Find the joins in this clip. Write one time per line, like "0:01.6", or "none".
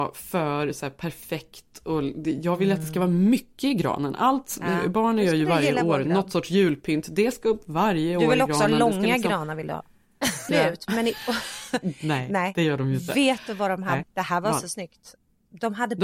0:10.5
0:14.0